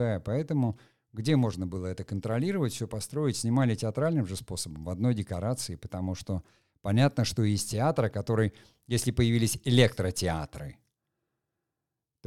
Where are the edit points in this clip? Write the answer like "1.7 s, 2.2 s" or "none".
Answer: none

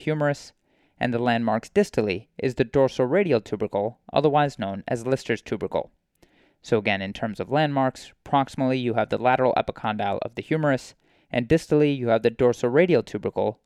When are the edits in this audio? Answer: none

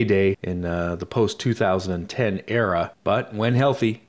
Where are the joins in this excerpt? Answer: none

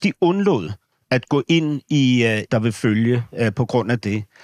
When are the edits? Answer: 2.5 s

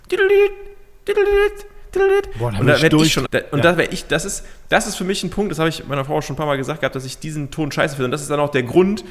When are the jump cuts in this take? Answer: 3.2 s

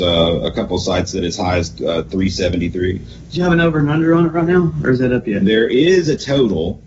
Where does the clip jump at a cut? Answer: none

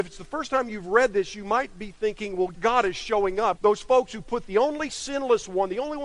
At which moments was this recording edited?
2.5 s, 3.5 s

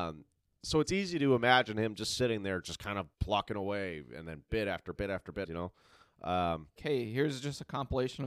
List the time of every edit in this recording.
3.1 s, 5.4 s, 6.8 s

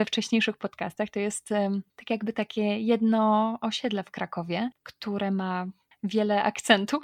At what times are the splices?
1.9 s

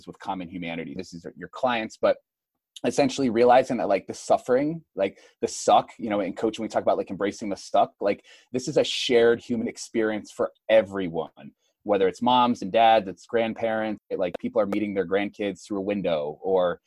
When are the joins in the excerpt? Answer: 1.0 s, 14.0 s

